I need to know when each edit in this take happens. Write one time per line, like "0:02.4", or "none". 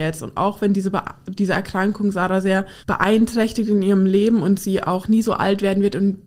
0:02.8
0:05.0